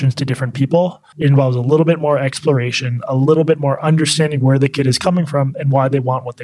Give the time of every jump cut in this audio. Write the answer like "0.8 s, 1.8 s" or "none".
1.1 s